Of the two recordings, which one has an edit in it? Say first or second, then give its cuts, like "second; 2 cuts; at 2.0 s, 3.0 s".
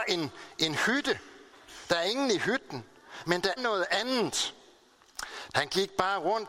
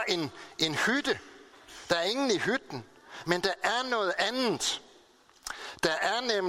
first; 2 cuts; at 3.6 s, 5.5 s